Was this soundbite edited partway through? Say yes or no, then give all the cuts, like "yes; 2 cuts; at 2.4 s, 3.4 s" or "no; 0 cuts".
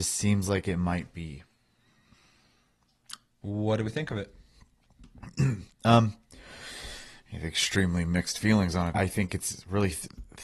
yes; 2 cuts; at 3.4 s, 8.9 s